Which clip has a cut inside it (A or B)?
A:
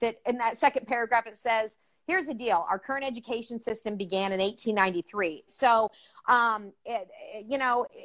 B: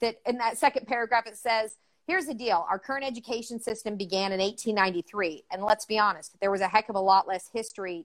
A